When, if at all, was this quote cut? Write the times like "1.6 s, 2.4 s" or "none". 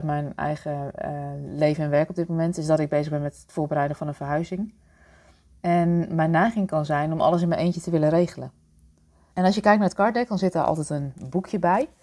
9.3 s